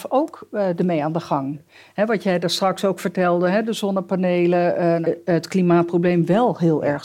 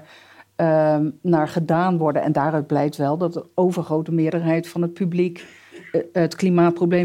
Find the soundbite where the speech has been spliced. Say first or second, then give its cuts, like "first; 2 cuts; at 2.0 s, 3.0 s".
first; 1 cut; at 5.0 s